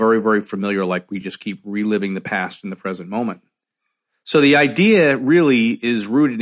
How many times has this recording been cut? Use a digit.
0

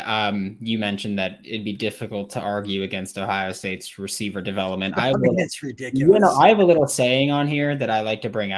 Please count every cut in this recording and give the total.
0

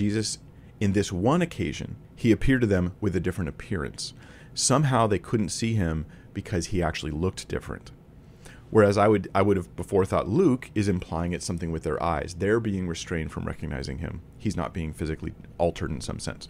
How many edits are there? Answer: 1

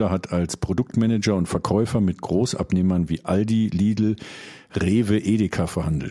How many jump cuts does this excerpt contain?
0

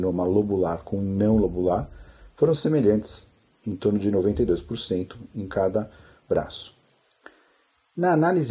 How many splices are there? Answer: 0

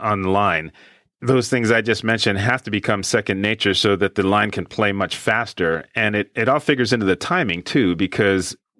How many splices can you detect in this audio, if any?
1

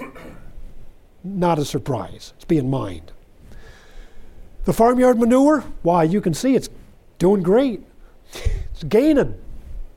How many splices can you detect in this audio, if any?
0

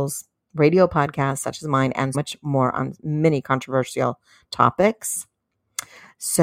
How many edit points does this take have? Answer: 1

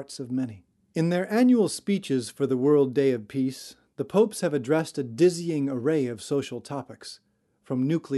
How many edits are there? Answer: 0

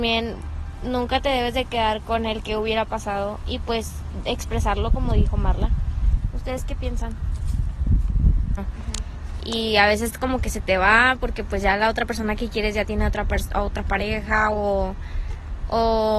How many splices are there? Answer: 1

